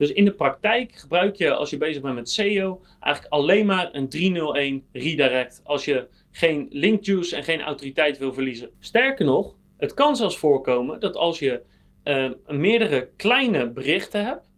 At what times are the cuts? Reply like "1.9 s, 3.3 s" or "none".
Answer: none